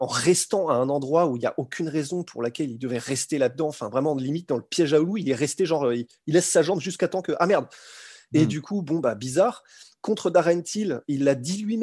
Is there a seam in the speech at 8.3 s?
no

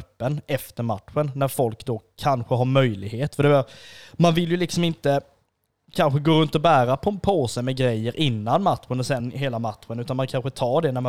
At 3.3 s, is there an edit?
no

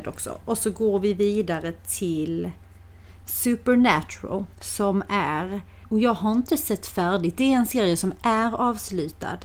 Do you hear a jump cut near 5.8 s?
yes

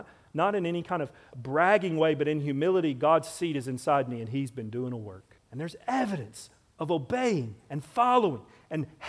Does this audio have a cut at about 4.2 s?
no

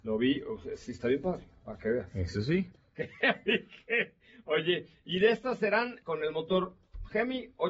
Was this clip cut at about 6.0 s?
yes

